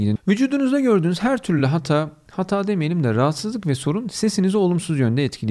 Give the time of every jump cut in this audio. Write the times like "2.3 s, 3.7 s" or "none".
none